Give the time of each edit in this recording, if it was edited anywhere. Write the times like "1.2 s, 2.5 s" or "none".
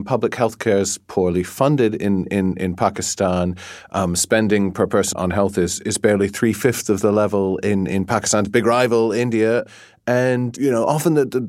5.1 s